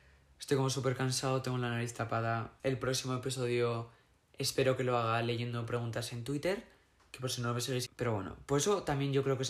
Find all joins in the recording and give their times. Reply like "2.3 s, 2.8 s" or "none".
2.6 s, 7.9 s